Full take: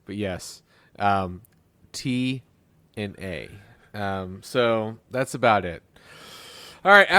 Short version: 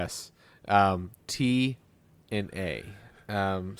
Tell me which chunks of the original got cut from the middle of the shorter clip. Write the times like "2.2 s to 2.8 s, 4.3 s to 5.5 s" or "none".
1.5 s to 1.9 s